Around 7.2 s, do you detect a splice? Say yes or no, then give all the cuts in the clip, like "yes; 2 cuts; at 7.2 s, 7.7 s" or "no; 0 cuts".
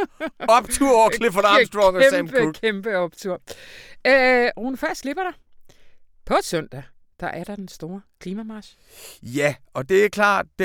no; 0 cuts